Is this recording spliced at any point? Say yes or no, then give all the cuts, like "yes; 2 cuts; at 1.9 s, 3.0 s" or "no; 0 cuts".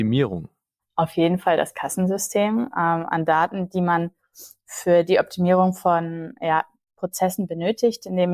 yes; 1 cut; at 2.7 s